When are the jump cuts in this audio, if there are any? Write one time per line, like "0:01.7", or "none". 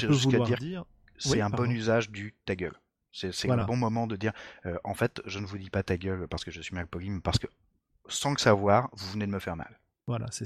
none